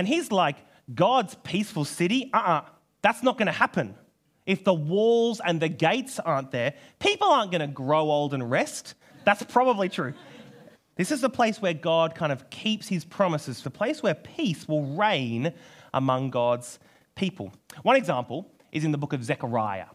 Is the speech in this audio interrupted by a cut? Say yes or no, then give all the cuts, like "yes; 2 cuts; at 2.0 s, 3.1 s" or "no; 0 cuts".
yes; 3 cuts; at 9.1 s, 10.7 s, 13.6 s